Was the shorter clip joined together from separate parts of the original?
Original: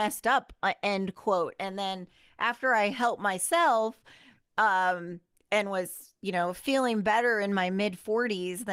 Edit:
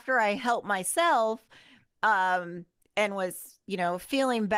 no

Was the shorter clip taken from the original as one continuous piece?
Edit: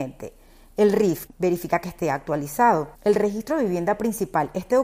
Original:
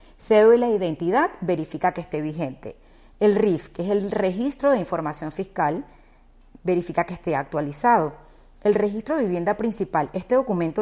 no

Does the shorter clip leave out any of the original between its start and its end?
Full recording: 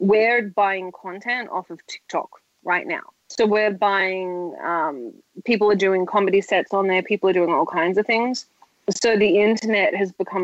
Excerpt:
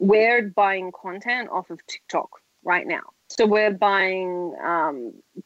no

